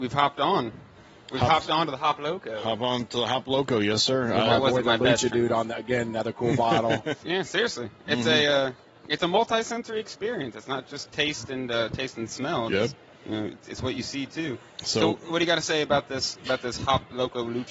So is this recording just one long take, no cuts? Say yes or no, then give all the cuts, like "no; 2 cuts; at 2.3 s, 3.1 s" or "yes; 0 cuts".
no; 1 cut; at 7.2 s